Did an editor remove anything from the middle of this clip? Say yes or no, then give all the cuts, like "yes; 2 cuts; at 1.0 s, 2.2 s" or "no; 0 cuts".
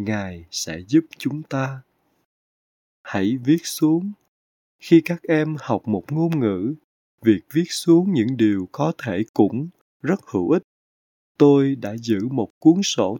no; 0 cuts